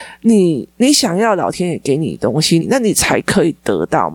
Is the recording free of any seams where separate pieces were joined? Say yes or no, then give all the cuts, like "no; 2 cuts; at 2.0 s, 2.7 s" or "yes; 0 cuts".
no; 1 cut; at 2.6 s